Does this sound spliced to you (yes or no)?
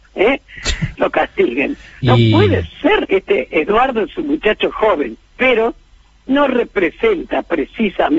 yes